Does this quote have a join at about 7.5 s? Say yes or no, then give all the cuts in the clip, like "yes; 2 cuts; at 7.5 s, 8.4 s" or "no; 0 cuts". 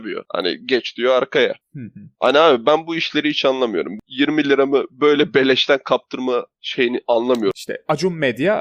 no; 0 cuts